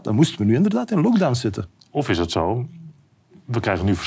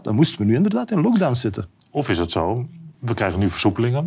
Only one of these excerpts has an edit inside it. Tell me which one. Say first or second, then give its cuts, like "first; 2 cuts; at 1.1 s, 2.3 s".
second; 1 cut; at 2.9 s